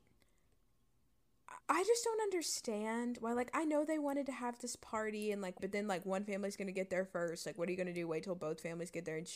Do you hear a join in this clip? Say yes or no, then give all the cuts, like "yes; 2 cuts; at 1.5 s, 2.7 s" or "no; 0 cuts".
yes; 2 cuts; at 1.6 s, 5.6 s